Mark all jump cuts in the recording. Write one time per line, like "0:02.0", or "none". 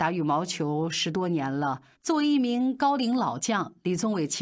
0:01.9